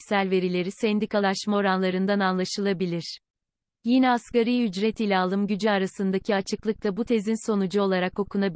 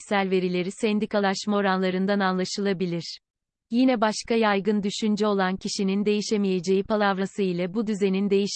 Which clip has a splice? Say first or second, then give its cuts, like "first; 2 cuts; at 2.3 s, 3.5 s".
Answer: second; 1 cut; at 3.6 s